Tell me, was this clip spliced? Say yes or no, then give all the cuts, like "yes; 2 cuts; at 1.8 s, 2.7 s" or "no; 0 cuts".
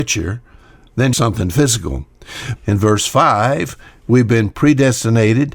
yes; 2 cuts; at 1.1 s, 2.6 s